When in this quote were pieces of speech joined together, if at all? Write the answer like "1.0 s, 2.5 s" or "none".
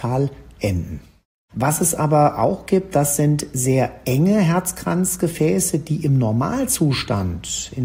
1.5 s